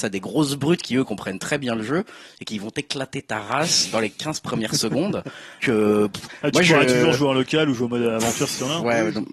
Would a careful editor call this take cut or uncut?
cut